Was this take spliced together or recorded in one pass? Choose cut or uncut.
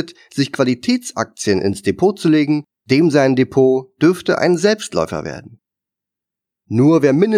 cut